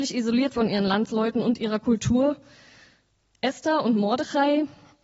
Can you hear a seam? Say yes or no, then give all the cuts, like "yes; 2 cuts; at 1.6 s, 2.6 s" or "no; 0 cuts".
yes; 1 cut; at 3.2 s